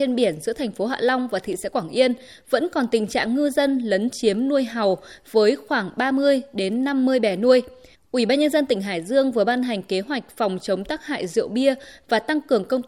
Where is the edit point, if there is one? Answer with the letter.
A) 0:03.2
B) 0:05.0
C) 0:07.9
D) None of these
C